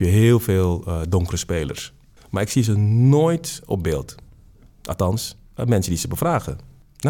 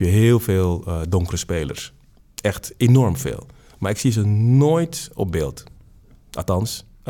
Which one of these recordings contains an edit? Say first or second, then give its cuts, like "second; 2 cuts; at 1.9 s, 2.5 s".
first; 1 cut; at 2.2 s